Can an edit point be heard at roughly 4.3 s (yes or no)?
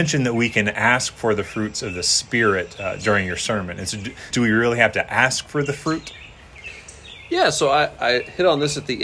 yes